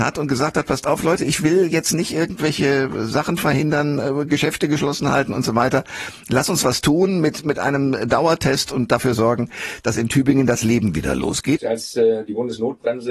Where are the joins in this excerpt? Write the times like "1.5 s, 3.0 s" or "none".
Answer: 11.6 s